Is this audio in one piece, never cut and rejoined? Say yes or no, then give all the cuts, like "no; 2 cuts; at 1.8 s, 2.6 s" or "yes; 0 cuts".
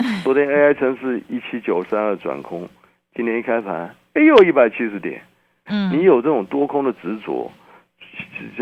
no; 1 cut; at 5.7 s